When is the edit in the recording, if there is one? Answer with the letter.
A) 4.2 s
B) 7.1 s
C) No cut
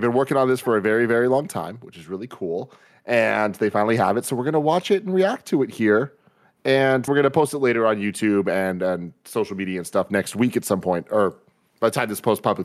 B